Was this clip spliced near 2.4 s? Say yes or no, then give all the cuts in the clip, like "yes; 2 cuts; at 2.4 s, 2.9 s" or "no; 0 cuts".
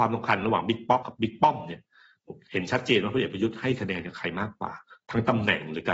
no; 1 cut; at 1.0 s